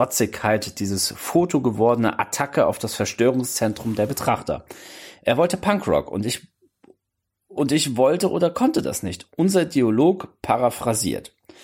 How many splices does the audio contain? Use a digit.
0